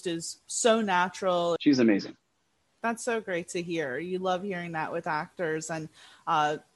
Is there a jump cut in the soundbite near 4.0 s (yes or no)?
no